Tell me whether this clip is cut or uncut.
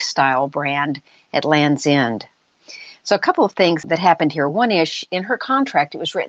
uncut